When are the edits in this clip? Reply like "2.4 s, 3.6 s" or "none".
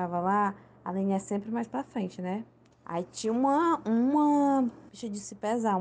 2.7 s